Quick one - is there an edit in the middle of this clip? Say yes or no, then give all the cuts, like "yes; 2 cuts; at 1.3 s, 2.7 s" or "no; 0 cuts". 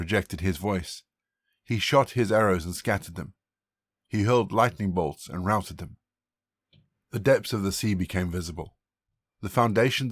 no; 0 cuts